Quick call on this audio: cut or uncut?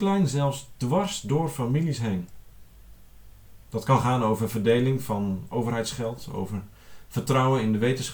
cut